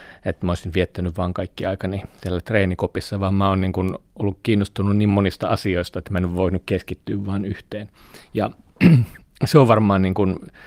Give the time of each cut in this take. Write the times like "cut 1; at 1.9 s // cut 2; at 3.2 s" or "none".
none

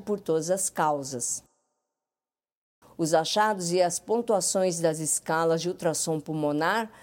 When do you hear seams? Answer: cut 1; at 2.8 s

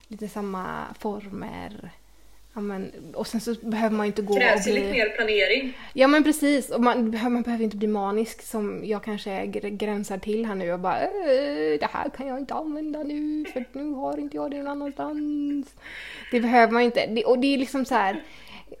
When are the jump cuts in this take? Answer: none

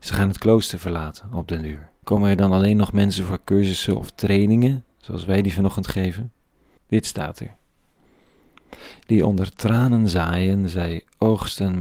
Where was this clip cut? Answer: cut 1; at 2.0 s // cut 2; at 6.8 s

